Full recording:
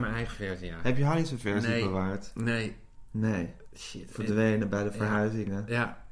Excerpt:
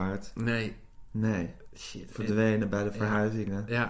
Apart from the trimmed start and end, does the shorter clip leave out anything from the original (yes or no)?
no